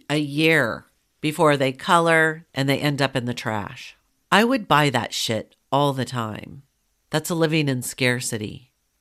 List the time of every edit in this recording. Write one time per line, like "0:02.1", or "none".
0:02.5